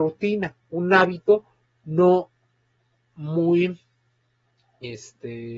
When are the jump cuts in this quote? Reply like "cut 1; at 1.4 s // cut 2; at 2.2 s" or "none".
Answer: none